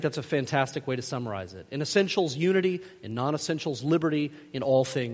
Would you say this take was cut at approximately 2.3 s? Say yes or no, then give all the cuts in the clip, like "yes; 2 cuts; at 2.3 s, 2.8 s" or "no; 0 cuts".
no; 0 cuts